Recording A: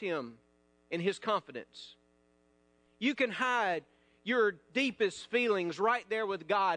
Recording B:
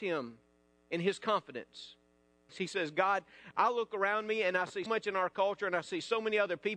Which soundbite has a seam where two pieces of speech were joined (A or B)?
B